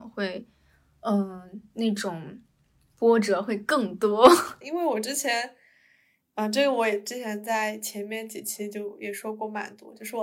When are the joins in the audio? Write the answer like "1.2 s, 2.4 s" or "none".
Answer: 4.6 s